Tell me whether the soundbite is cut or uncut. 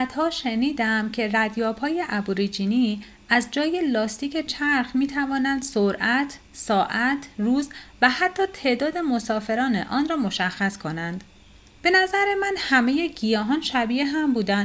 cut